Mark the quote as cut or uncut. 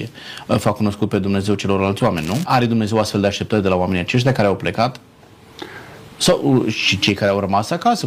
cut